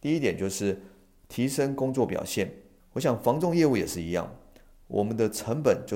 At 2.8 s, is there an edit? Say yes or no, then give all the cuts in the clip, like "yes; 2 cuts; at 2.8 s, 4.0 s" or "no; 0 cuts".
yes; 1 cut; at 2.8 s